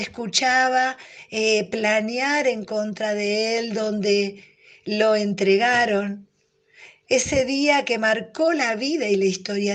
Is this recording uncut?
yes; 0 cuts

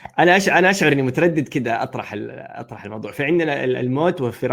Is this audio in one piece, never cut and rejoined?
yes; 0 cuts

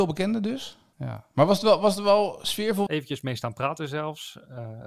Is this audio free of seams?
no; 2 cuts; at 0.9 s, 2.9 s

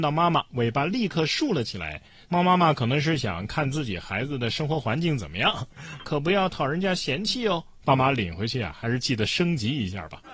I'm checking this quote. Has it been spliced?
yes; 2 cuts; at 6.0 s, 7.8 s

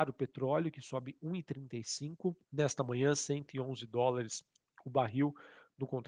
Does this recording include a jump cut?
yes; 1 cut; at 2.4 s

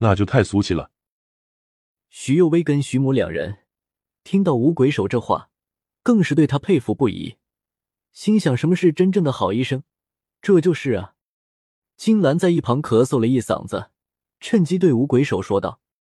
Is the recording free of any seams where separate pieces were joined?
yes; 0 cuts

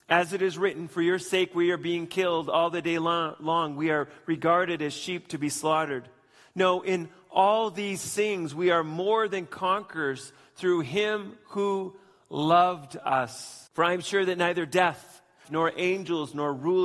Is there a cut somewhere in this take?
yes; 2 cuts; at 13.7 s, 15.4 s

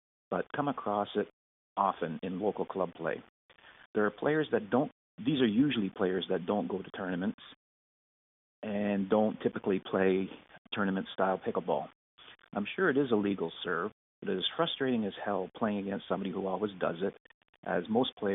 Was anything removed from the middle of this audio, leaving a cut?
no; 0 cuts

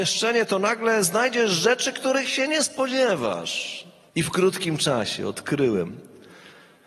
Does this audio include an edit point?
yes; 1 cut; at 4.1 s

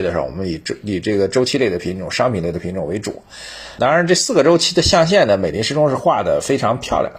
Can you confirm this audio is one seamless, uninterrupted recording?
no; 1 cut; at 3.8 s

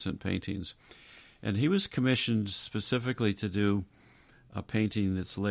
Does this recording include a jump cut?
no; 0 cuts

